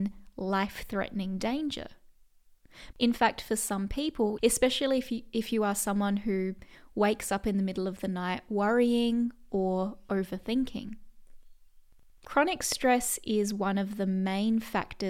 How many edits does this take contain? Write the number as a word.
two